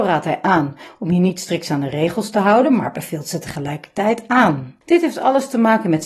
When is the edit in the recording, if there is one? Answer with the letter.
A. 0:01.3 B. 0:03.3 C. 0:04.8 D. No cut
C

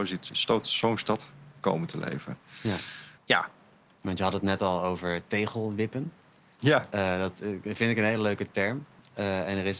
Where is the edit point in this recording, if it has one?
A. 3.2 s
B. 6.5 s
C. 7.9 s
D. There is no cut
A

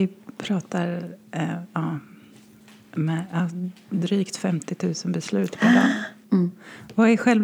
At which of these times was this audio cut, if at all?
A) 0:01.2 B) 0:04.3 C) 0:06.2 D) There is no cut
C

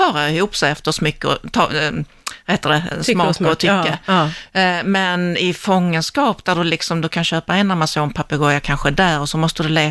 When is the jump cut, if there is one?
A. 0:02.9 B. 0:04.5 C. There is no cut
A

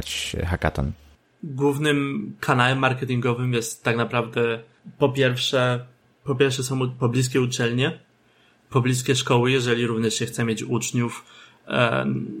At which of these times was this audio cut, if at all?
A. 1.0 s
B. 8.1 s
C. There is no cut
C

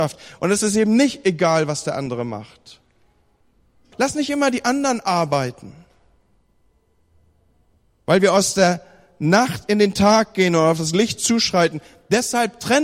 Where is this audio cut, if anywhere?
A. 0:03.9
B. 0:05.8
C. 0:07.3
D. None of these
A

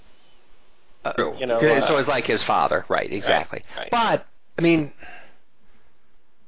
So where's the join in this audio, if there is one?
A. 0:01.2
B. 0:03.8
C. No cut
A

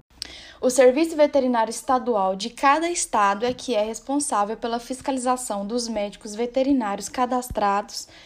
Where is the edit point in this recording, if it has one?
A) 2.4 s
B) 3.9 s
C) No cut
C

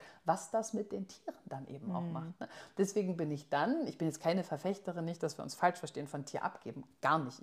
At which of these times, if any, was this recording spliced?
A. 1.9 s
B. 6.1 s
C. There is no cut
C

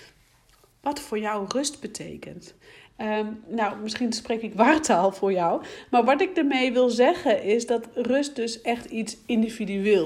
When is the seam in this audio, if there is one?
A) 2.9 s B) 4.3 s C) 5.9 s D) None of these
A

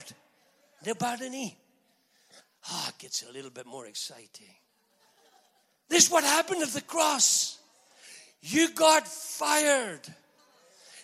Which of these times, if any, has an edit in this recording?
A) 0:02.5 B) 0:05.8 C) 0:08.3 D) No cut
B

